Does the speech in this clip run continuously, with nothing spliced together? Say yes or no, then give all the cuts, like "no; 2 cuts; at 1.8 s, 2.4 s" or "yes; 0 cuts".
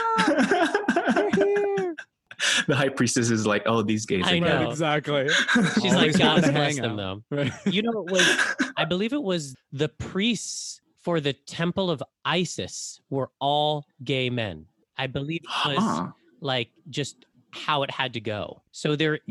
yes; 0 cuts